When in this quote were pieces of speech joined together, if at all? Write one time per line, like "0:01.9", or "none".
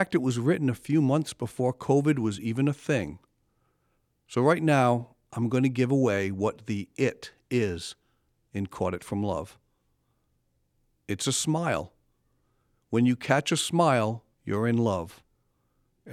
0:14.3